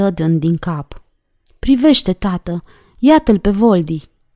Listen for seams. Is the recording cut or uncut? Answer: cut